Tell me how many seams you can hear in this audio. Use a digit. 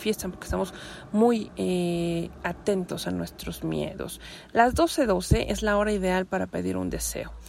1